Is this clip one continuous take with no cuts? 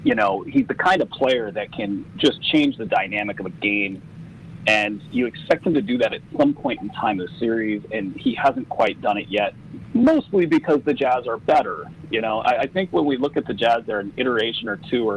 yes; 0 cuts

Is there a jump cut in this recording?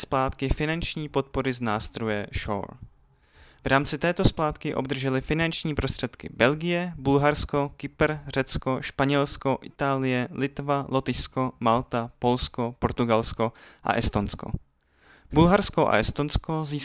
no; 0 cuts

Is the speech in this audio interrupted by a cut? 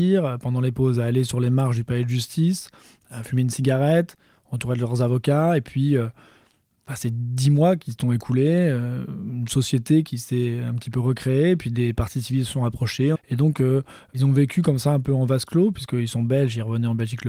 yes; 1 cut; at 13.2 s

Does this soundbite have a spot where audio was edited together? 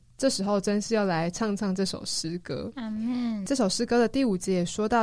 no; 0 cuts

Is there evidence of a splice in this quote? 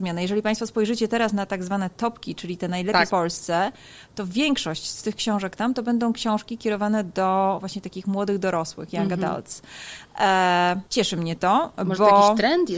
yes; 2 cuts; at 3.1 s, 10.9 s

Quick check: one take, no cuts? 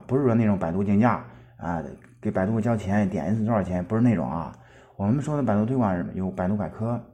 yes; 0 cuts

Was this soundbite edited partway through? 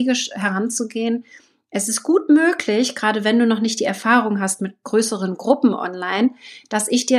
no; 0 cuts

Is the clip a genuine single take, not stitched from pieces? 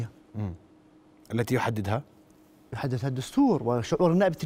yes; 0 cuts

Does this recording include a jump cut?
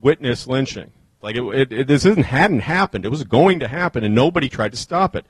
yes; 1 cut; at 1.2 s

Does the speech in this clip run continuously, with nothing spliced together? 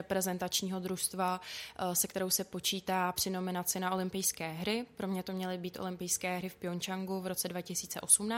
yes; 0 cuts

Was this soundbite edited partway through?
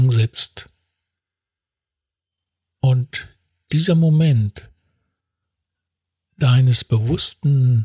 no; 0 cuts

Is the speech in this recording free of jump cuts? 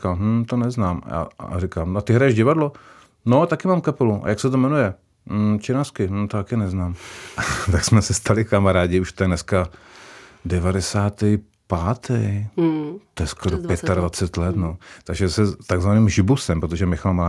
yes; 0 cuts

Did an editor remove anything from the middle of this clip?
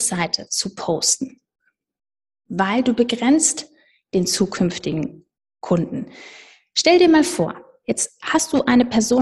no; 0 cuts

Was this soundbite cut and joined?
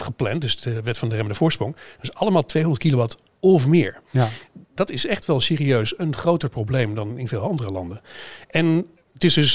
yes; 2 cuts; at 4.8 s, 6.0 s

